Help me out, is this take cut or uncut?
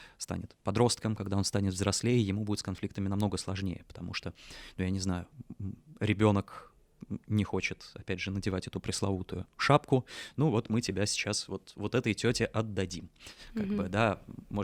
uncut